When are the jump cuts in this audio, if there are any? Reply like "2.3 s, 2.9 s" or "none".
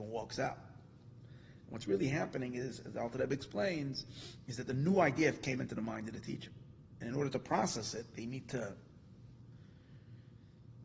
none